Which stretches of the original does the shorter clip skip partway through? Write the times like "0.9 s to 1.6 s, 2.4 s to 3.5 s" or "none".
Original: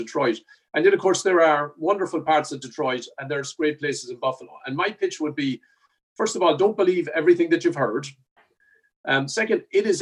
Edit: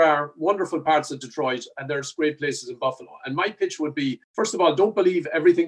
5.6 s to 6.1 s